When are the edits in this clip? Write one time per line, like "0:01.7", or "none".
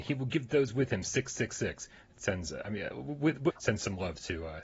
0:02.1
0:03.5